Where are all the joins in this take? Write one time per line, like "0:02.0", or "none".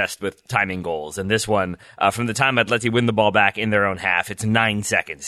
none